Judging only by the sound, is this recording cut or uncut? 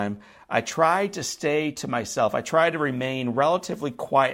uncut